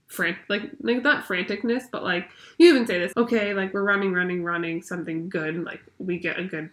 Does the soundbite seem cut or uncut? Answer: cut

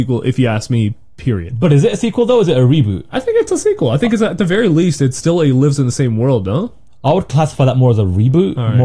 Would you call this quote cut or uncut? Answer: uncut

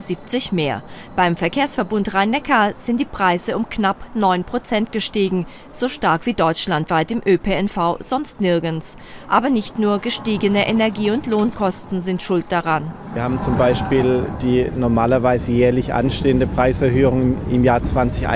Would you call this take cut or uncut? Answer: uncut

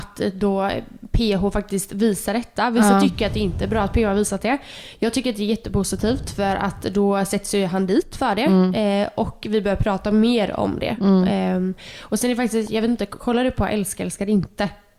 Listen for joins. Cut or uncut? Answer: uncut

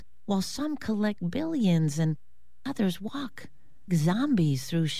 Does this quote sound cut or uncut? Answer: cut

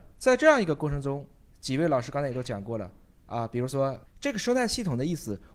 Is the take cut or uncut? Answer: cut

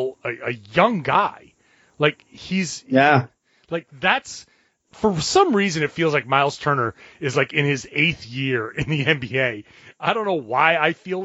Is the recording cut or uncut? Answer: cut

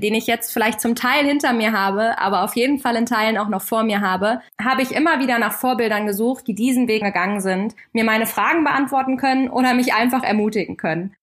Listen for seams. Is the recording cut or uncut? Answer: cut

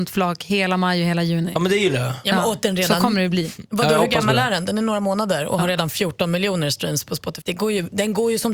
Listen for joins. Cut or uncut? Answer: cut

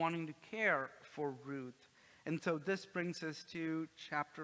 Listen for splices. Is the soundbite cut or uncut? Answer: uncut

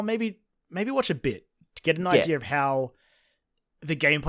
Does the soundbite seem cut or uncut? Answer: uncut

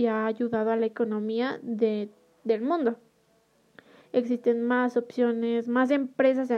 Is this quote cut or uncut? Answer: cut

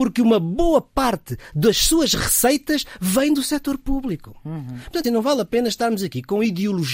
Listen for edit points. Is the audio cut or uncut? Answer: cut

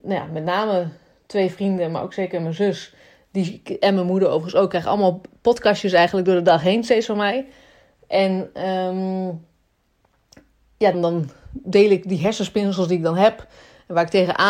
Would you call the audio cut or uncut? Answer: cut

